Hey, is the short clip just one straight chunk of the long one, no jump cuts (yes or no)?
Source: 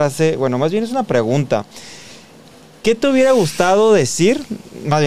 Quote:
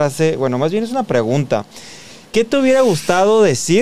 no